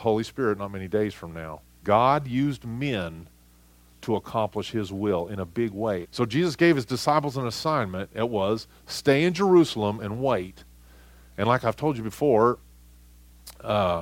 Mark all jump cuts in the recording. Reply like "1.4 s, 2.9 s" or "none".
1.8 s, 6.0 s